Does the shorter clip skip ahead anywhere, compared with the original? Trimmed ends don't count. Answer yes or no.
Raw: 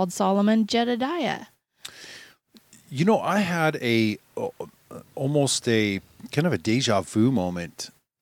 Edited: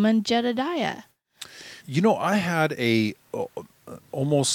yes